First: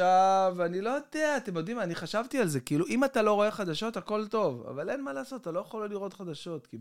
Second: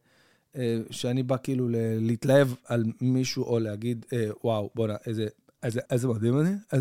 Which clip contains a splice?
second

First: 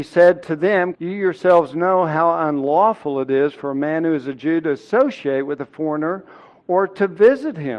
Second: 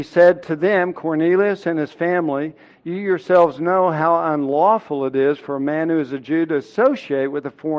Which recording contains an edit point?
first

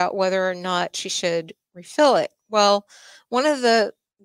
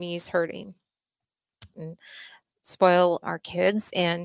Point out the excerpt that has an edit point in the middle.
second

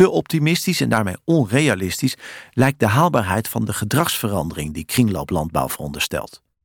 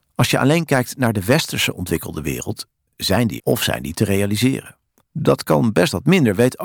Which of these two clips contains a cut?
second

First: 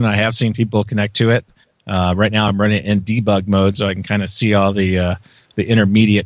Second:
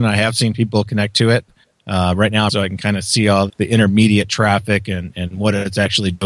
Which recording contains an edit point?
second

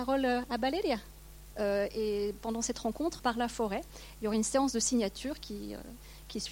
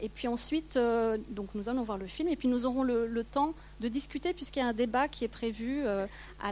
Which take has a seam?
first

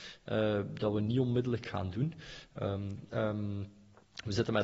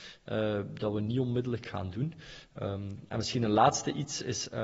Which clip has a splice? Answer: first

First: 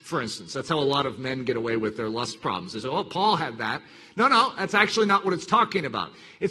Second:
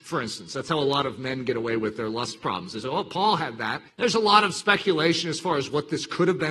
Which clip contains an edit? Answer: second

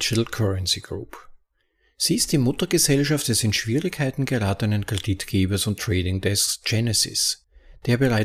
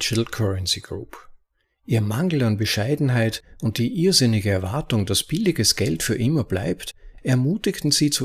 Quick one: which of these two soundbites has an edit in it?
second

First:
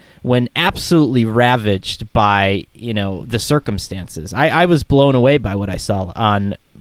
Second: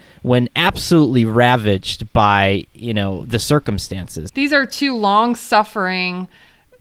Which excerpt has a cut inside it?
second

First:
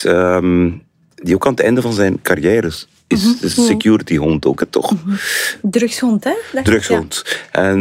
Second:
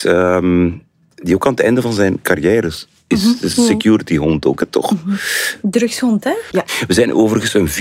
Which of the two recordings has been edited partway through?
second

